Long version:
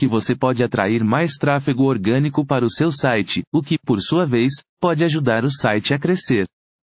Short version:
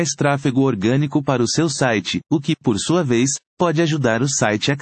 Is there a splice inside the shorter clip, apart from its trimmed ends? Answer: no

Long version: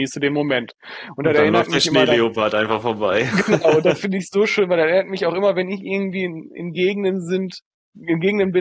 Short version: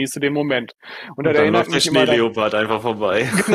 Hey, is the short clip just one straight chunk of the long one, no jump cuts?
yes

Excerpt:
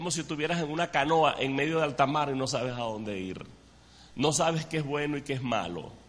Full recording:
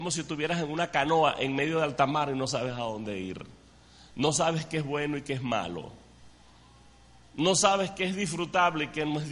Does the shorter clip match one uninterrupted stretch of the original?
yes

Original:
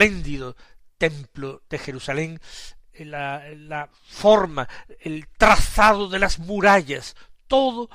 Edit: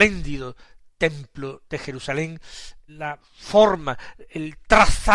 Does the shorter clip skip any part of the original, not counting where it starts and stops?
yes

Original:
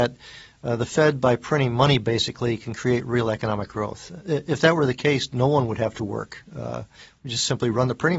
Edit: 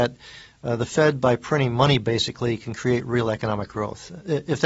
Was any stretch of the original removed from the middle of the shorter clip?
no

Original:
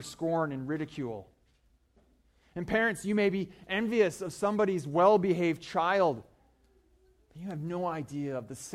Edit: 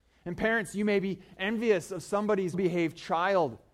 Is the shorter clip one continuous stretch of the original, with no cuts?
no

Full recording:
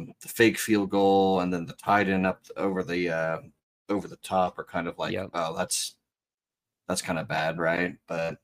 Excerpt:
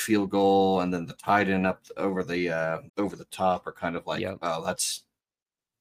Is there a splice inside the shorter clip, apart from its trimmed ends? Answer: yes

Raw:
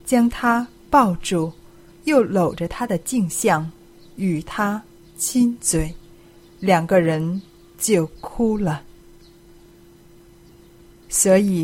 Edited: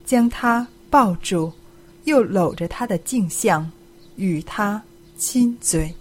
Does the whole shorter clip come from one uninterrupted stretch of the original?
yes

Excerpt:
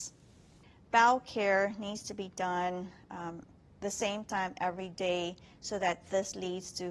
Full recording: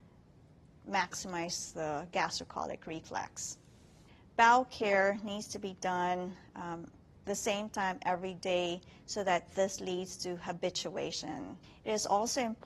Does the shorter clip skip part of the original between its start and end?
no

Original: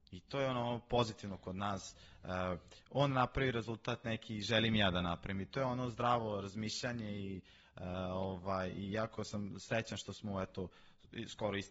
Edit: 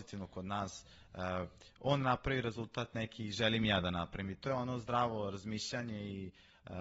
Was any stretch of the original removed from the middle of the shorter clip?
no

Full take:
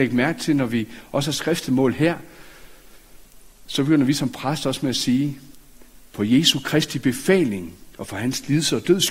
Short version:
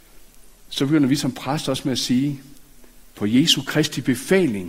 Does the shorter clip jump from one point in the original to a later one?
no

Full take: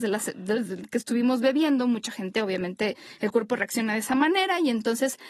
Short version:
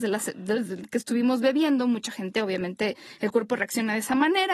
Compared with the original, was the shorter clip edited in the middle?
no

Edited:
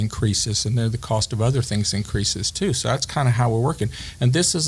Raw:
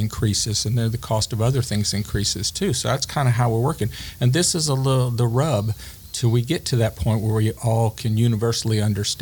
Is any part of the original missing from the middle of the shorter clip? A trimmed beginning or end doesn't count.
no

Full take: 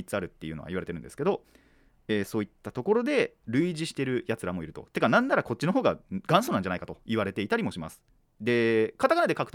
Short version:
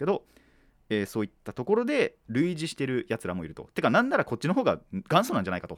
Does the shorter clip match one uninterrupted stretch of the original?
yes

